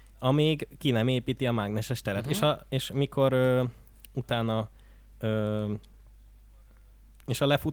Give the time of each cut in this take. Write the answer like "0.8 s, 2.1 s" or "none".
none